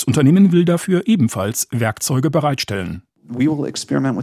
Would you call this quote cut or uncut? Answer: uncut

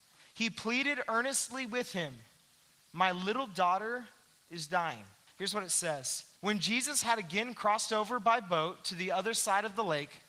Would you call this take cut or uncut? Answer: cut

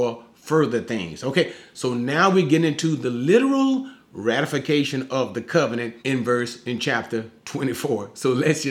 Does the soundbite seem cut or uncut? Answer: cut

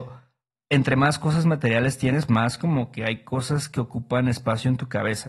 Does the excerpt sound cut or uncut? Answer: cut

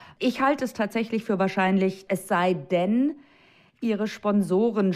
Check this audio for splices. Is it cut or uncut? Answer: cut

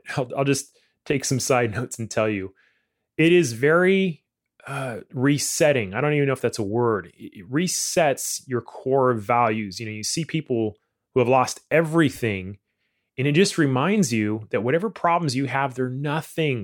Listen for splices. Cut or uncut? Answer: uncut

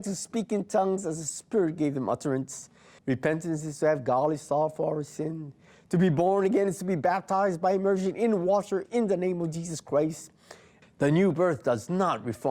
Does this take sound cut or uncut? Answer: cut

